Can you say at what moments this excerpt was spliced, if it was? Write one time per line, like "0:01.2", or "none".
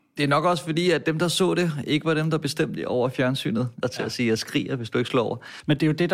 0:03.8